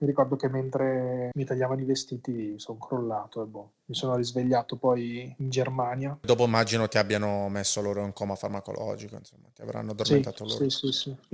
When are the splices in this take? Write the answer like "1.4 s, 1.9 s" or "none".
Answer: 3.8 s